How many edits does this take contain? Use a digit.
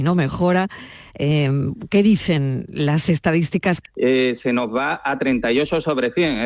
1